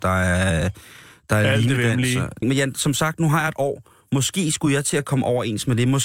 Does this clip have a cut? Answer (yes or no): yes